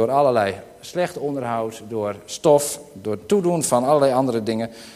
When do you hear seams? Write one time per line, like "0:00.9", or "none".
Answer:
none